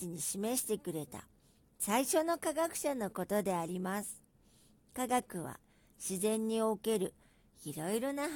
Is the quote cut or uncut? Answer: uncut